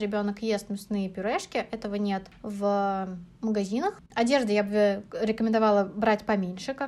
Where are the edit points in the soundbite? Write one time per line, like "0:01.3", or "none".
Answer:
0:04.1